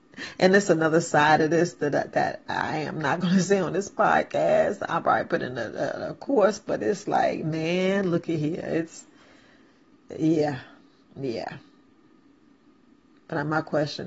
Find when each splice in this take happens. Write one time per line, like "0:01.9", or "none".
none